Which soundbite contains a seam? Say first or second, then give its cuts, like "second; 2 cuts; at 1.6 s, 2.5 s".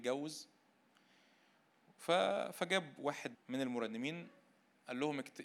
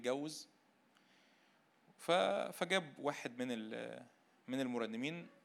first; 1 cut; at 3.3 s